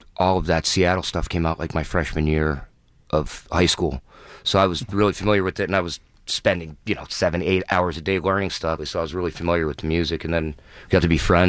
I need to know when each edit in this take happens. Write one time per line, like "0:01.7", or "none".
0:08.8